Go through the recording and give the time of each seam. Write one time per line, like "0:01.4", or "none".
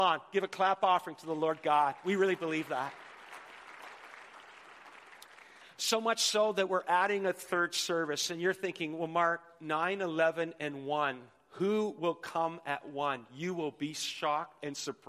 none